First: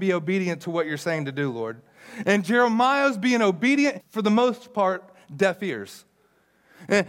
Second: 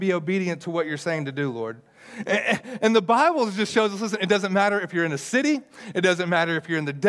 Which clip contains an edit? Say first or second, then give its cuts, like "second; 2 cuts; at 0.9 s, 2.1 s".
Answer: first; 2 cuts; at 2.2 s, 4.0 s